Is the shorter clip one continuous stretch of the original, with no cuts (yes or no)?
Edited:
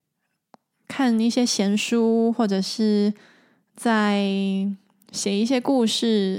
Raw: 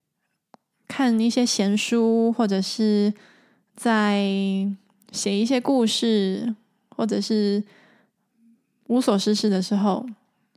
yes